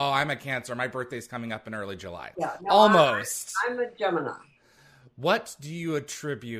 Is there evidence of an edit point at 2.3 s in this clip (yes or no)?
yes